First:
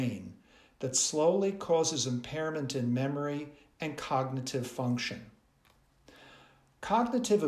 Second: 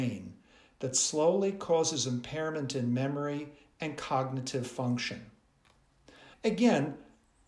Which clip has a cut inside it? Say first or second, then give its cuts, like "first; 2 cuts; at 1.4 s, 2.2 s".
second; 1 cut; at 6.3 s